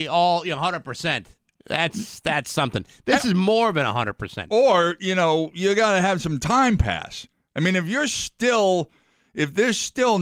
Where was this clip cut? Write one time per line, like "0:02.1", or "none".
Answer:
none